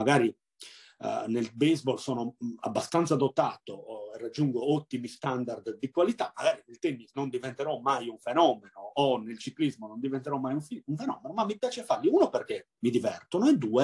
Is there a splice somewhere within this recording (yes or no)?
no